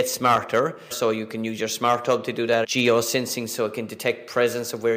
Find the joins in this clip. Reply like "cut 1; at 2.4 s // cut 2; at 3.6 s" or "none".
cut 1; at 0.9 s // cut 2; at 2.6 s

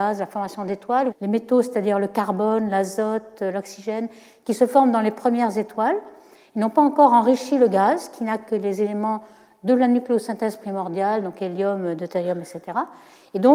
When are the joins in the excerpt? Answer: cut 1; at 1.1 s

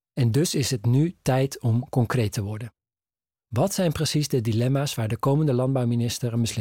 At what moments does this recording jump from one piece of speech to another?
none

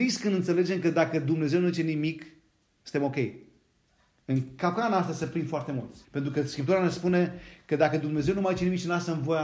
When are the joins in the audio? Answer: cut 1; at 6.0 s

